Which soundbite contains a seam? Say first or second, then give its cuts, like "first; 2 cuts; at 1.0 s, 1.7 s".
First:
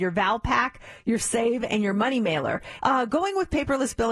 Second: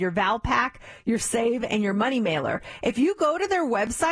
first; 1 cut; at 2.8 s